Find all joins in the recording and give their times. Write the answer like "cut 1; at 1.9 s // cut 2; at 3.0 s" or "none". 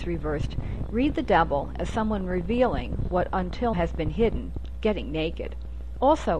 cut 1; at 3.7 s // cut 2; at 4.7 s